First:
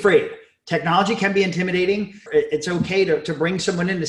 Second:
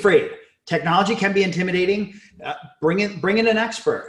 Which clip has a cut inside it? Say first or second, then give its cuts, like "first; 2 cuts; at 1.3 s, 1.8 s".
first; 1 cut; at 2.3 s